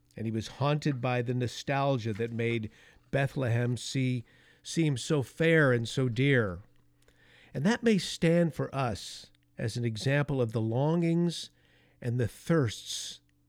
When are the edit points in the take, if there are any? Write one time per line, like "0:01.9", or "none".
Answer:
none